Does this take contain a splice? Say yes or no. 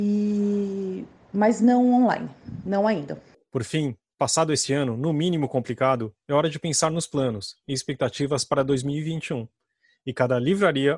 no